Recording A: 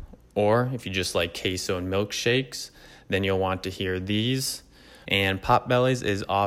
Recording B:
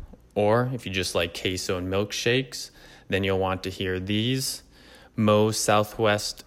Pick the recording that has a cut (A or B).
A